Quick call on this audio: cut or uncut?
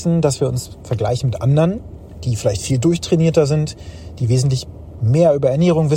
uncut